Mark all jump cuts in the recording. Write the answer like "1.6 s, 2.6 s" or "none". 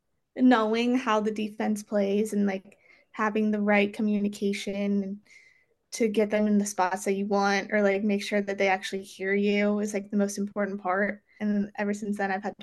11.4 s